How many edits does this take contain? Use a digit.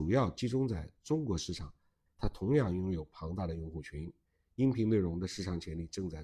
1